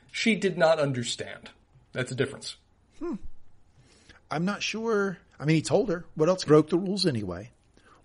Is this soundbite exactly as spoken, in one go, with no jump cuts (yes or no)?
no